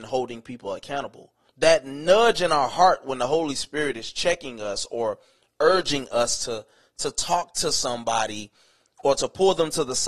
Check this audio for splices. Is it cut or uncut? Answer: cut